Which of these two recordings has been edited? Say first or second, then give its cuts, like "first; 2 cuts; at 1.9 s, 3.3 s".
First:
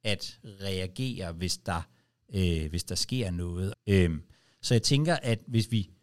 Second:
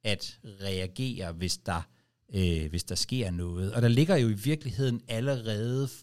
first; 1 cut; at 3.7 s